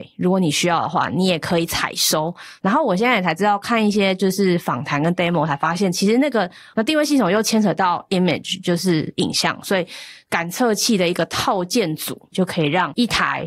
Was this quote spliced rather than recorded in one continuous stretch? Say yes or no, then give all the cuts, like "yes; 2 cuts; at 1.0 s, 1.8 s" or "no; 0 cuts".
yes; 2 cuts; at 6.7 s, 12.3 s